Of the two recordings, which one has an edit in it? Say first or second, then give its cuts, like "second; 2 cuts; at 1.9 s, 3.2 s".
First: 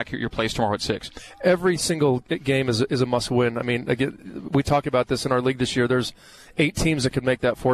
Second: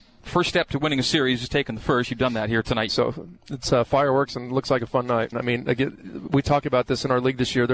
second; 2 cuts; at 2.9 s, 5.3 s